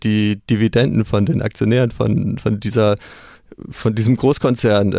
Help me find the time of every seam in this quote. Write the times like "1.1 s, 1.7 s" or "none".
2.4 s